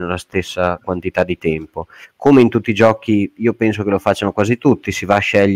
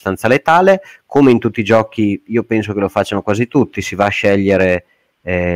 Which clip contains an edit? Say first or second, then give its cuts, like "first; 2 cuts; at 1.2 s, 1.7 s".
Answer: first; 1 cut; at 2.0 s